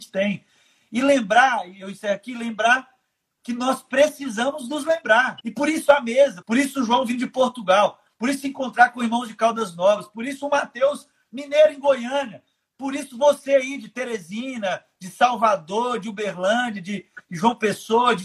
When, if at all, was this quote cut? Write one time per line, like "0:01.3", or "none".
0:05.4
0:06.4